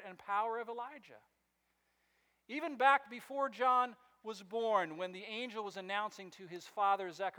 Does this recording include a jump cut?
no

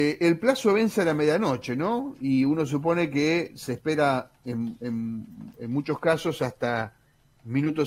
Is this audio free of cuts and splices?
yes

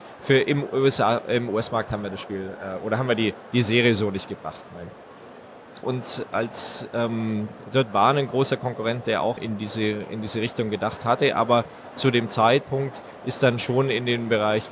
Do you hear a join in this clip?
yes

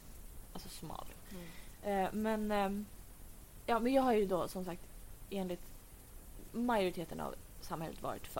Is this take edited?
yes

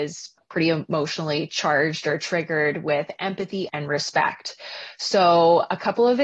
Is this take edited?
yes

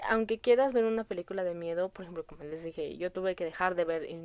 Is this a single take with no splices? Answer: yes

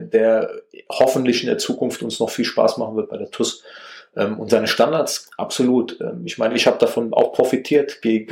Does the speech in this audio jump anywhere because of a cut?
no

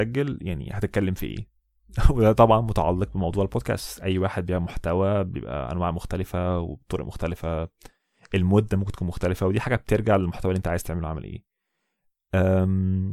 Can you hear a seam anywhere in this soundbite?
no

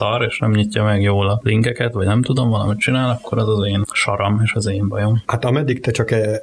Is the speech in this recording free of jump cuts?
yes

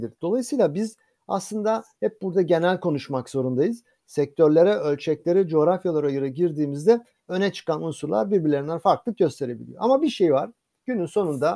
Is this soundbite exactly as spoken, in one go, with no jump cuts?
yes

